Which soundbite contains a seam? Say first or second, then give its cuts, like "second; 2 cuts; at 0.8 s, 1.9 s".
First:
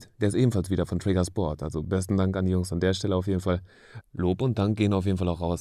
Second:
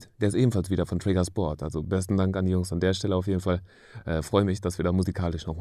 first; 1 cut; at 4.0 s